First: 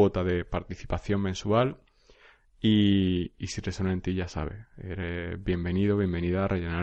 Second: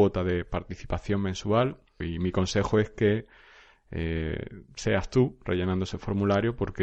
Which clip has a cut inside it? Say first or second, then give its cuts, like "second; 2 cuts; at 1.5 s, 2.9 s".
second; 2 cuts; at 2.0 s, 4.7 s